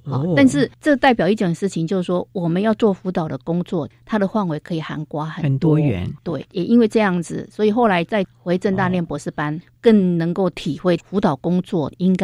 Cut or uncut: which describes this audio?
uncut